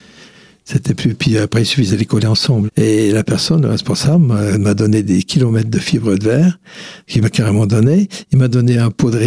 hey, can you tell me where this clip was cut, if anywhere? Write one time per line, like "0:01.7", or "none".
0:02.7